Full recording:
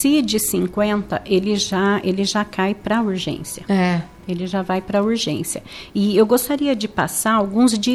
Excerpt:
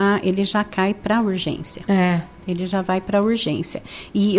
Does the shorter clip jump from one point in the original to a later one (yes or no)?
no